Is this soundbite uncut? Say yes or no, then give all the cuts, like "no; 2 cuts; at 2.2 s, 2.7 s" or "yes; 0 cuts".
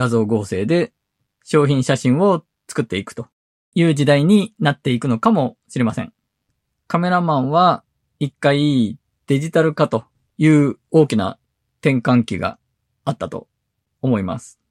yes; 0 cuts